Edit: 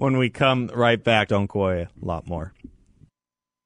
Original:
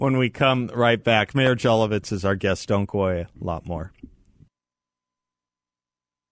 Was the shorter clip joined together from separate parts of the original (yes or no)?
yes